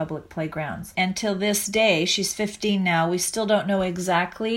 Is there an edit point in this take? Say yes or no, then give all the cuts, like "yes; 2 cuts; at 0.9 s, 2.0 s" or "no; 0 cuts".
yes; 1 cut; at 0.9 s